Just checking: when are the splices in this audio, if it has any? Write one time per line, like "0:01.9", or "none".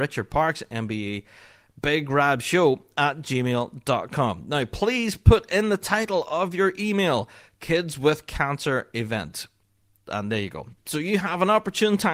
0:10.8